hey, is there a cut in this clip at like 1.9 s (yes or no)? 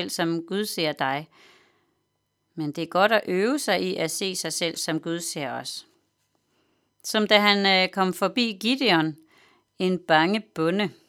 no